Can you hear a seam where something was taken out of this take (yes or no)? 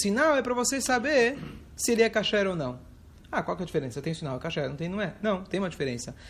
no